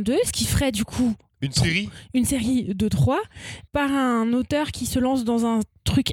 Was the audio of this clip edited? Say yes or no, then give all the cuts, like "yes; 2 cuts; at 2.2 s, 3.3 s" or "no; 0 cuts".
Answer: yes; 1 cut; at 3.7 s